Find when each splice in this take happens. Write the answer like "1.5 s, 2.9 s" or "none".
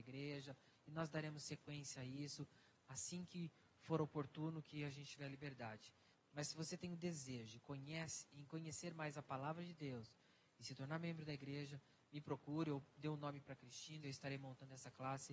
6.1 s, 14.0 s